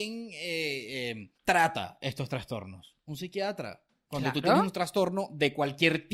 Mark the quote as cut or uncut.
cut